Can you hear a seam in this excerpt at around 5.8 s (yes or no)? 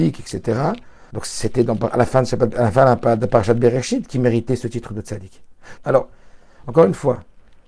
yes